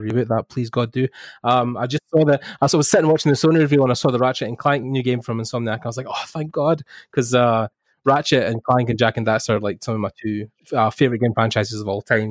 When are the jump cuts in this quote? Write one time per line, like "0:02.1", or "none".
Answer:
none